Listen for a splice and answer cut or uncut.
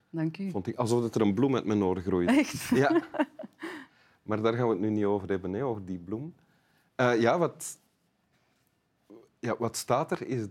uncut